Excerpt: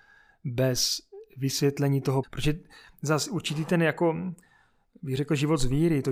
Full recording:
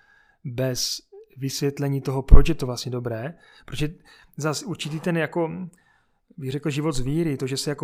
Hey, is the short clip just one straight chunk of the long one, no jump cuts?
no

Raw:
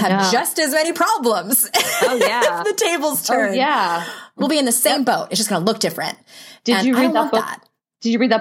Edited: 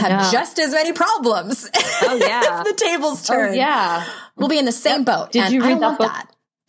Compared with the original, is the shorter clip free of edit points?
no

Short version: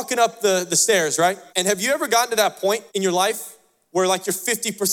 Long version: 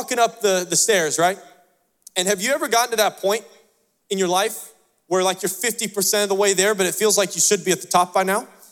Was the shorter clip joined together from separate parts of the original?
yes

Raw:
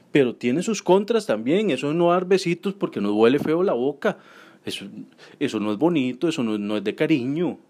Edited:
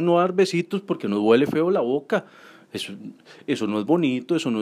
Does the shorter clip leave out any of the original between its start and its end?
no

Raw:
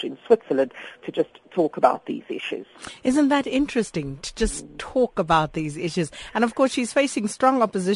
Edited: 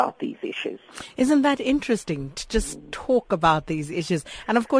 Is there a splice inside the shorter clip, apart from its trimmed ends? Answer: no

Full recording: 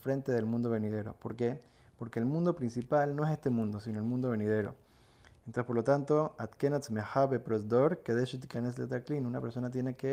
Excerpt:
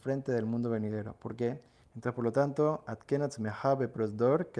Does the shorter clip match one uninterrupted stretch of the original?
no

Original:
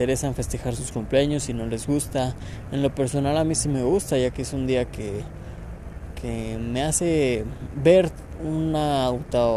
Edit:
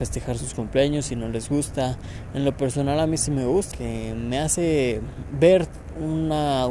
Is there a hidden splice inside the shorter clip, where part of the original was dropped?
yes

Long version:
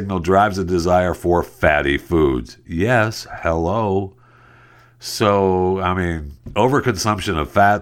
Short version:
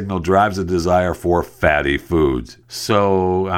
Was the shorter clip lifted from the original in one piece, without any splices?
no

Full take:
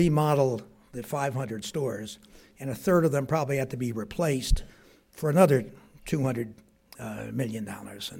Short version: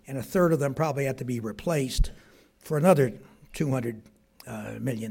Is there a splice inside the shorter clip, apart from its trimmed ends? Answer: no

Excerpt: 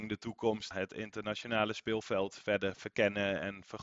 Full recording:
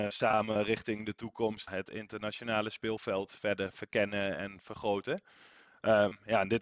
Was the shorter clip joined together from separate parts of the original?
no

